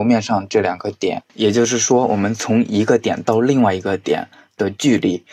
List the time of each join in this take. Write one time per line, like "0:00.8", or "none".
0:01.3